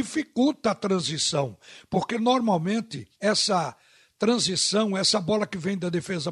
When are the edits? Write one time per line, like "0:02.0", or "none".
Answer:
0:03.1